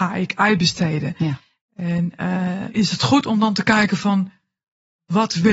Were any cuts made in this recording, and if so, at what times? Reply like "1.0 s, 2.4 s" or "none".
2.7 s